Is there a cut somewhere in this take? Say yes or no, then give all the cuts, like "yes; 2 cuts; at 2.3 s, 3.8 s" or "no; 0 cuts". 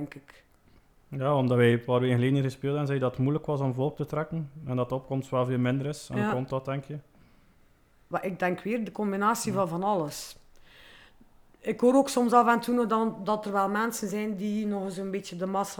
no; 0 cuts